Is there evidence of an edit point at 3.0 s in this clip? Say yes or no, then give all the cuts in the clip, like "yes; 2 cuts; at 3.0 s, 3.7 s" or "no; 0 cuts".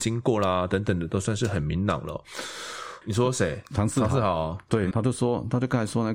yes; 2 cuts; at 3.0 s, 4.9 s